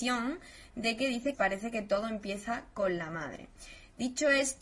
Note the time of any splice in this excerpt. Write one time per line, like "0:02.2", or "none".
0:01.3